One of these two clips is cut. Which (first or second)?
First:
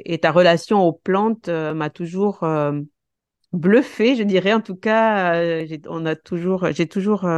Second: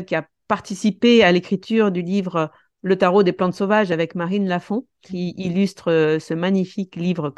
second